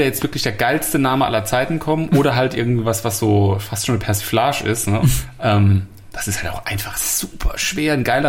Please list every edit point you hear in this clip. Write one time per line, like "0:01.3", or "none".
0:05.0